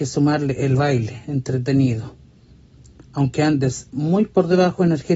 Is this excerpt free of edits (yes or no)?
yes